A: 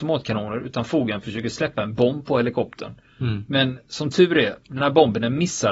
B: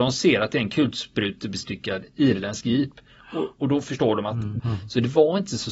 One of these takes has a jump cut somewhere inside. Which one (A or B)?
B